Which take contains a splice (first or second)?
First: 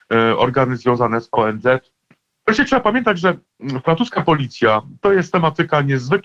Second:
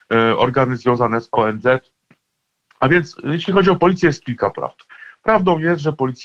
first